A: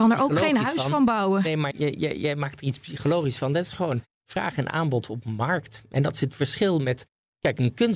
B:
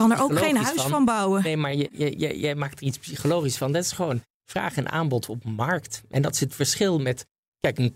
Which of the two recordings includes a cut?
A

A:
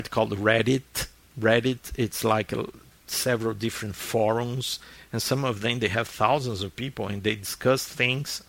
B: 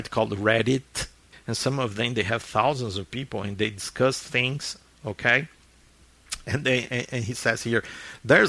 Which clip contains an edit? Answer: B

